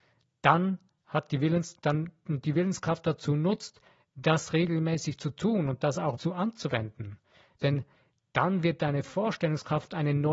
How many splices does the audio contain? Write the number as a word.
two